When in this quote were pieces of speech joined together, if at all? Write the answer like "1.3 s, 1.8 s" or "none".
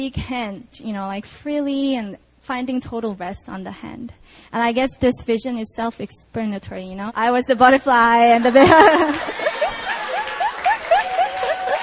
7.1 s